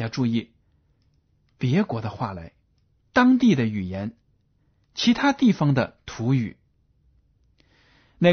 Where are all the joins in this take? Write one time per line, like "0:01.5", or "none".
0:03.1

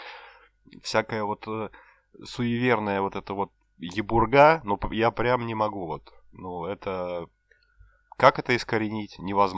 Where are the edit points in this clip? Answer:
none

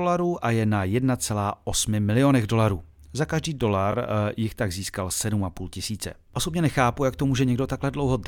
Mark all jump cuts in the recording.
none

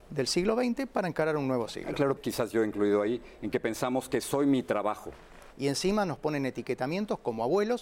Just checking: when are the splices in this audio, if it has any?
0:02.2
0:05.5

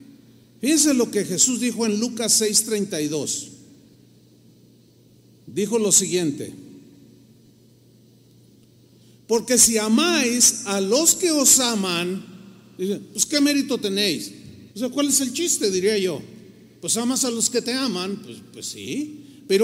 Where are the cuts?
0:14.7

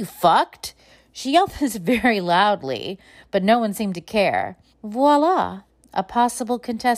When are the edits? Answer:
0:04.7

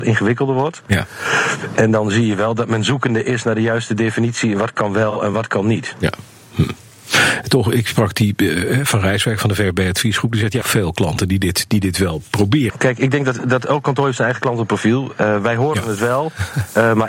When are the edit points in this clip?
0:10.6
0:12.7

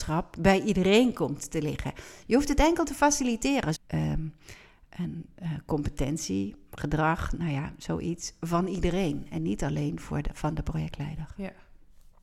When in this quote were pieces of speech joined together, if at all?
0:02.2
0:03.8

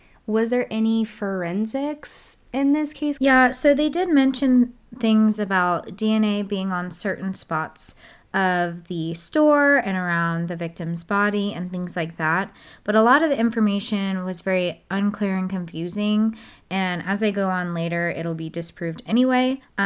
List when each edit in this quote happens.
0:03.2

